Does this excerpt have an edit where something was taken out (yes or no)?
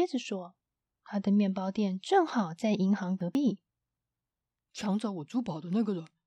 no